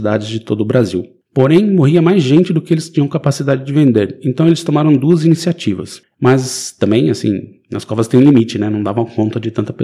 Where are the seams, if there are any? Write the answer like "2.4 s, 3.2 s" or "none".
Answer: 6.1 s